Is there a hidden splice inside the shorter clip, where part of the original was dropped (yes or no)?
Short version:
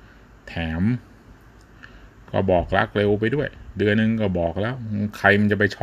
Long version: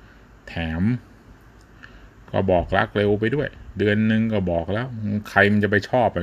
yes